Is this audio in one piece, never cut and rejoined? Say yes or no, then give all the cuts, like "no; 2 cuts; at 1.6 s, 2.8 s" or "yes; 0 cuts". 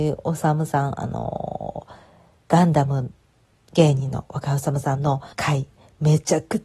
no; 1 cut; at 5.3 s